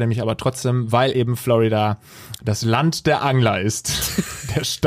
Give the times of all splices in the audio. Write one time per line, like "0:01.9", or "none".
none